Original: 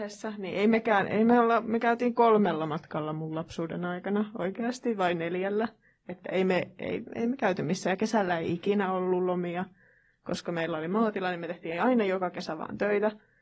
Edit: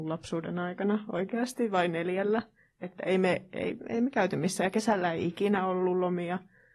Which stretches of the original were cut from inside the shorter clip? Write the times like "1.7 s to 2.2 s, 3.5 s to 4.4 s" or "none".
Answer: none